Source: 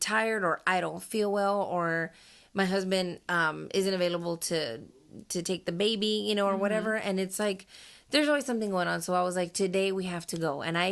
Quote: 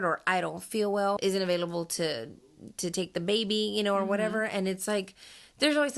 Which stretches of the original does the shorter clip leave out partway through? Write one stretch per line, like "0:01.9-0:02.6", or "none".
0:01.6-0:03.7